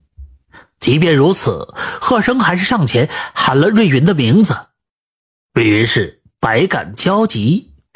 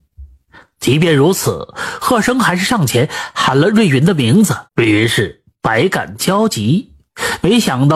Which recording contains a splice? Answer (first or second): second